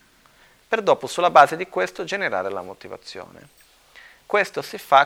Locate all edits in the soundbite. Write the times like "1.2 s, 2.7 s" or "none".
none